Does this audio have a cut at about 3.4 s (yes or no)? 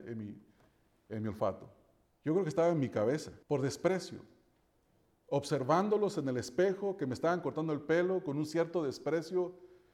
yes